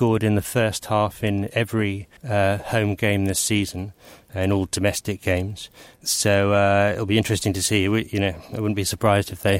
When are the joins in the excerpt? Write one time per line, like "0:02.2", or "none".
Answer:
0:02.2